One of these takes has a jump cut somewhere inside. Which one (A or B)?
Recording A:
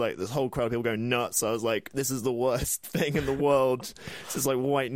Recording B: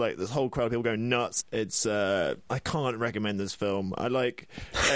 B